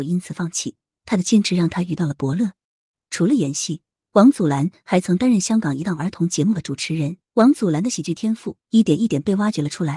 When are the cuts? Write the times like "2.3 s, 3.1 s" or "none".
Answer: 7.2 s